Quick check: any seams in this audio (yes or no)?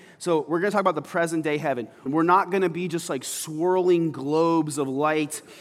yes